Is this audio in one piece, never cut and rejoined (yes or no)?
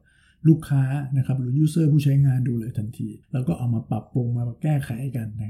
no